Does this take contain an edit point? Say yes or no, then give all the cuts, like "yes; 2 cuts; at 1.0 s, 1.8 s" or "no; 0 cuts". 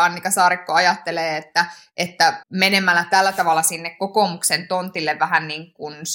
yes; 1 cut; at 2.4 s